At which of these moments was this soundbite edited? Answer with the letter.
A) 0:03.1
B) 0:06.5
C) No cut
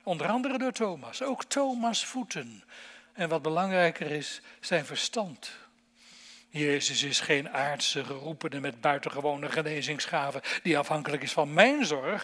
B